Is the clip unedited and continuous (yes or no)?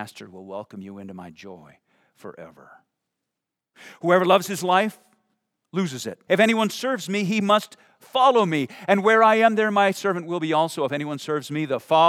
no